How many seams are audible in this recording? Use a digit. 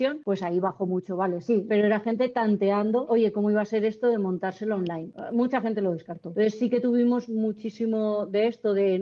1